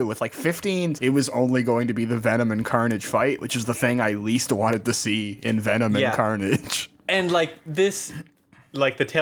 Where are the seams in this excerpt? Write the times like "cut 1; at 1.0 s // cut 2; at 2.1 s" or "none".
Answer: cut 1; at 0.9 s